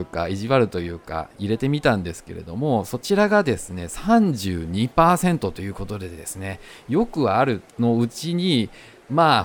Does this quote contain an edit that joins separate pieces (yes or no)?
yes